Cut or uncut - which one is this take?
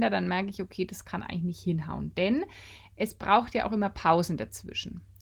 uncut